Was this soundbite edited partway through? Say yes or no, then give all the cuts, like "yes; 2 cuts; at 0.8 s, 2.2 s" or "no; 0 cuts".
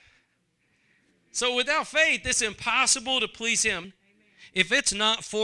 yes; 1 cut; at 3.8 s